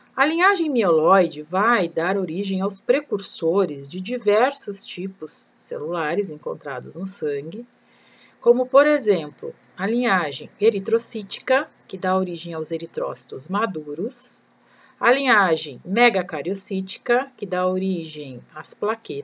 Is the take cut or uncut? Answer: uncut